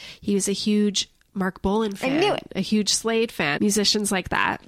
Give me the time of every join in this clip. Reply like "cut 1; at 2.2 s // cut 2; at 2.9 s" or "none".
cut 1; at 3.6 s